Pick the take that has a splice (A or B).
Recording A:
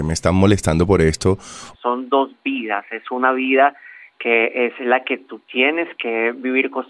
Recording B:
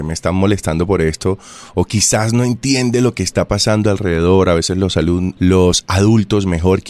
A